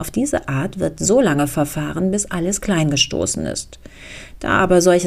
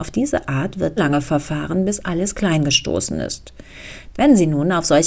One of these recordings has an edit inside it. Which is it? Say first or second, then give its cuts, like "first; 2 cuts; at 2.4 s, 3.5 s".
second; 2 cuts; at 1.0 s, 4.1 s